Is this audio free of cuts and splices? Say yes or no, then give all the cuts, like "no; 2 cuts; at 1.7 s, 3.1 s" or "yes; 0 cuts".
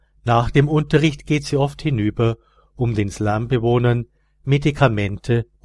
yes; 0 cuts